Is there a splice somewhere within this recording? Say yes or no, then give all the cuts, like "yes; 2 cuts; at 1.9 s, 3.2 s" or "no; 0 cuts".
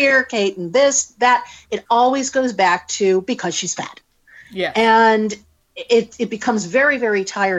no; 0 cuts